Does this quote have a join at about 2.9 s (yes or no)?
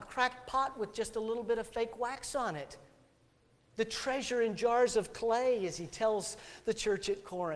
no